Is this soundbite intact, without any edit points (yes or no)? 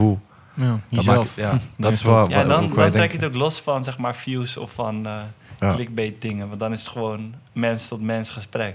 yes